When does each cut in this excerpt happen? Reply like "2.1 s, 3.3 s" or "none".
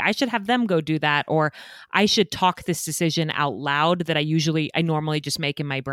none